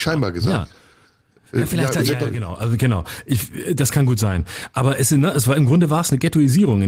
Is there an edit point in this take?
no; 0 cuts

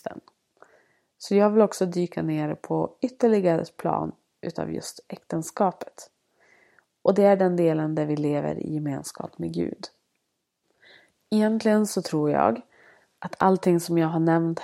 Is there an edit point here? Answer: no; 0 cuts

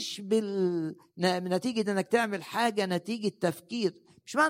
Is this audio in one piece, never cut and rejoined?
yes; 0 cuts

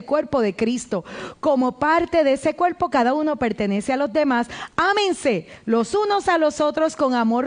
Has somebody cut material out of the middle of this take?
no; 0 cuts

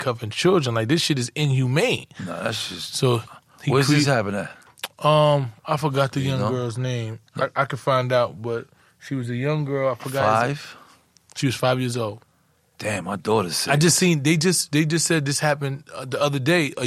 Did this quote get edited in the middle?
yes; 1 cut; at 7.3 s

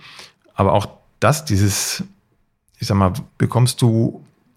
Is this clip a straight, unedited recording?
no; 1 cut; at 3.3 s

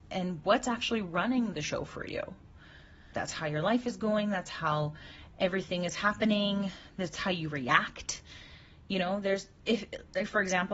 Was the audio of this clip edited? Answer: yes; 1 cut; at 3.1 s

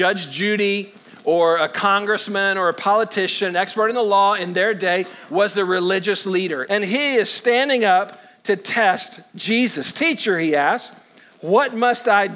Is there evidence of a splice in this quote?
yes; 1 cut; at 6.7 s

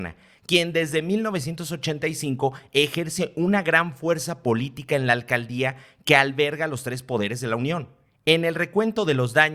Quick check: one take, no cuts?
yes; 0 cuts

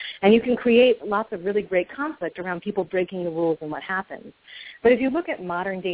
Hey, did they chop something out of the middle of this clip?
no; 0 cuts

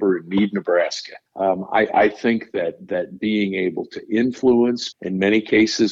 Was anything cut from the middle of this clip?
yes; 2 cuts; at 1.3 s, 4.9 s

